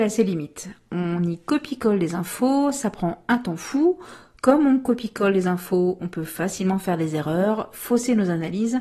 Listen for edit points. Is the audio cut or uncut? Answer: uncut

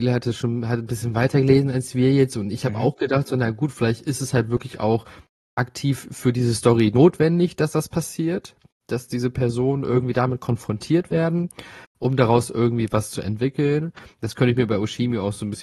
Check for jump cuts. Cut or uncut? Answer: uncut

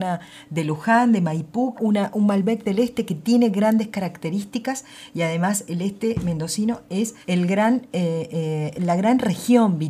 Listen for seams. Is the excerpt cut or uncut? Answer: cut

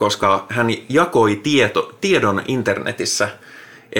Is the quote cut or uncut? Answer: uncut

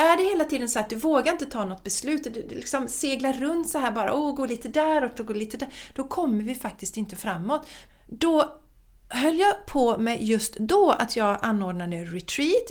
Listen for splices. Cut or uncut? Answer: cut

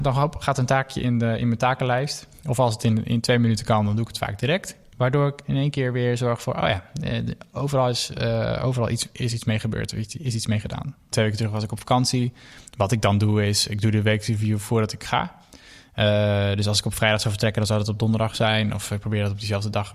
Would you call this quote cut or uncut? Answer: uncut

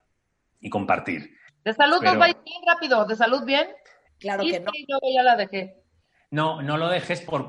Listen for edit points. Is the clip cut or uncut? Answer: cut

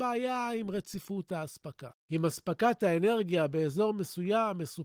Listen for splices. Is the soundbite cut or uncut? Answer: cut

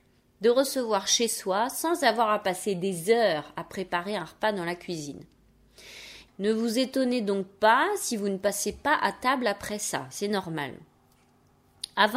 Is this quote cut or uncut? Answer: cut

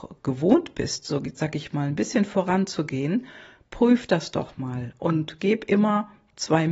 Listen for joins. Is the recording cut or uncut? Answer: uncut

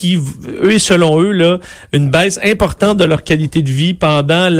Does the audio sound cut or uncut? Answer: uncut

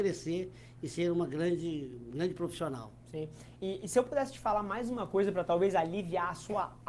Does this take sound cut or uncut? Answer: uncut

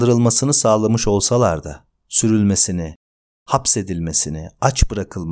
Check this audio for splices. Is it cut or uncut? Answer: uncut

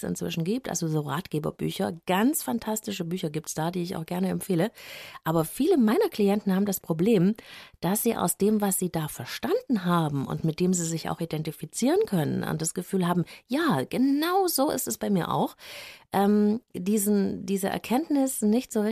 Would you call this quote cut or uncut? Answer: uncut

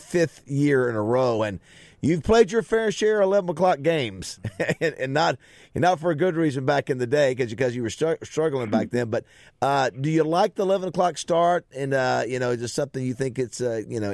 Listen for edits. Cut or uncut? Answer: uncut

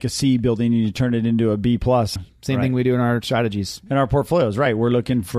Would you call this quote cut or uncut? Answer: cut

